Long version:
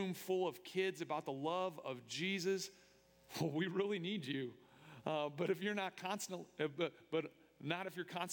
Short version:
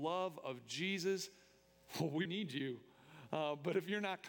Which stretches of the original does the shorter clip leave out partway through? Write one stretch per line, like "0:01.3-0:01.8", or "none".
0:03.7-0:04.0